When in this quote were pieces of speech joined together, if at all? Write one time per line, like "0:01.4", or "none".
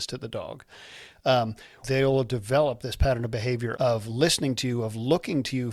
0:01.8
0:03.7